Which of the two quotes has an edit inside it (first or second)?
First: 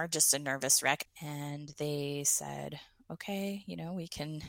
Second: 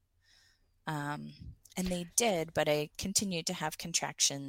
first